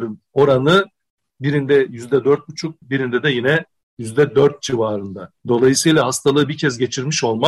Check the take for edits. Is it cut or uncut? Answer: cut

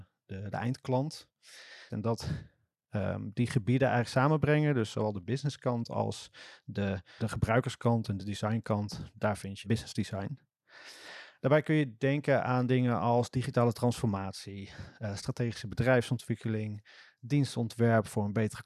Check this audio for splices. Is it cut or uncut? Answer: cut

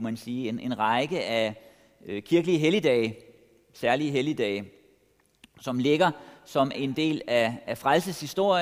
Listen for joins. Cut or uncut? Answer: cut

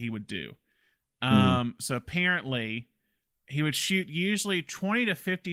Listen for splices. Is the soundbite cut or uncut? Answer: uncut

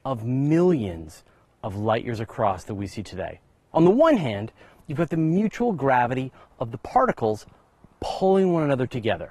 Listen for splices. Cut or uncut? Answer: cut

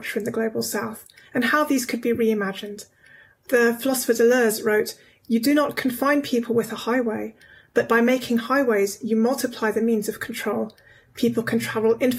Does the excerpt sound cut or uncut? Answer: uncut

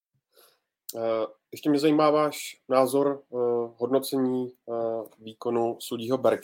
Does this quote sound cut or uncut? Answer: uncut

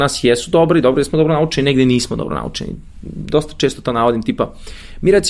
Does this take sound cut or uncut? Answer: uncut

